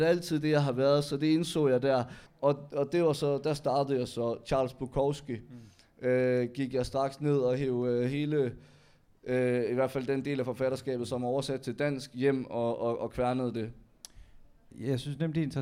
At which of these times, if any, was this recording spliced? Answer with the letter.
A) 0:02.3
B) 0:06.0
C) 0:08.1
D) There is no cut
A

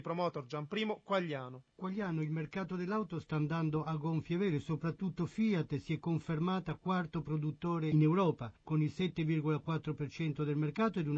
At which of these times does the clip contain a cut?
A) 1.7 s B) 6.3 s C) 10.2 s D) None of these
A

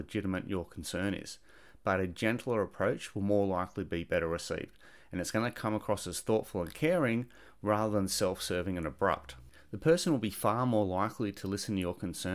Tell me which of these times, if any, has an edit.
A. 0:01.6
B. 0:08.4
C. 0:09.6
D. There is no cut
D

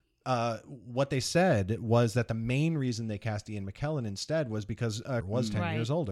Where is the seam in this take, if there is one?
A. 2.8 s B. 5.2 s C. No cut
B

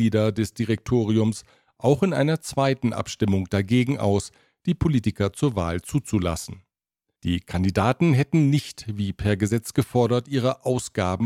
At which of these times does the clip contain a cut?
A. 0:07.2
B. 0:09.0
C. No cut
A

